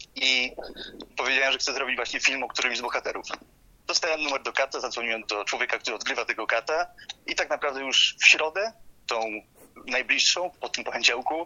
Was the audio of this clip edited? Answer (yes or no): yes